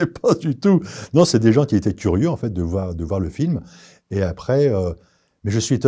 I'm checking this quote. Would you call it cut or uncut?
uncut